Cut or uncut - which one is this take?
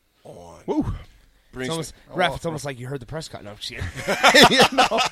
uncut